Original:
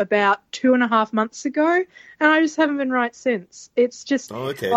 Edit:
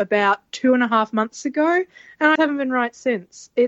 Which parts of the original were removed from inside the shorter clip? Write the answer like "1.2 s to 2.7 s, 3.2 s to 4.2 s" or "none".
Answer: 2.4 s to 2.6 s